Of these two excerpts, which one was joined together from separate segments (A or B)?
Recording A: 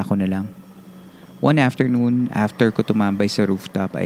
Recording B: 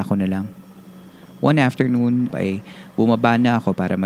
B